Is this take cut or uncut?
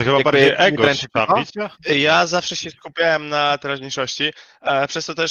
cut